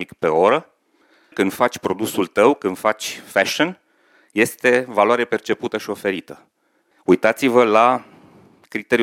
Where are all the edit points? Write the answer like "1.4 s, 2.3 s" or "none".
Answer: 1.3 s, 6.9 s